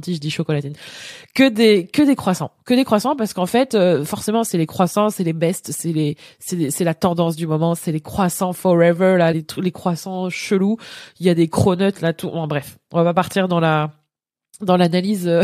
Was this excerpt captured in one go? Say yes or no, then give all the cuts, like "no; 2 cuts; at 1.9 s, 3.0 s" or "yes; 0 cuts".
no; 1 cut; at 9.3 s